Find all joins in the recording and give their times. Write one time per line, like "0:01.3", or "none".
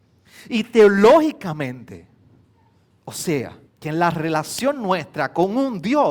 0:03.7